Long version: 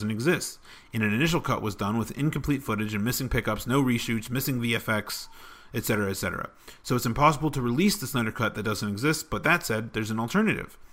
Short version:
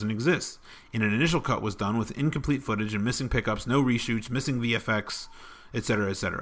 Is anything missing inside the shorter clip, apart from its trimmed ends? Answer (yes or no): no